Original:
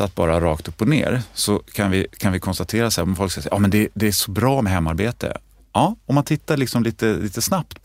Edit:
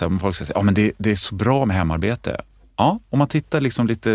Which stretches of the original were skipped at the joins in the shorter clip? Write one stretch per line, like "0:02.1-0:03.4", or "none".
none